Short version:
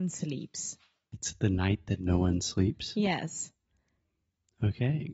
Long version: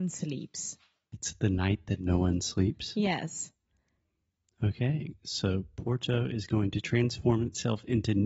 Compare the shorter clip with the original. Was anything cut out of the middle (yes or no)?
no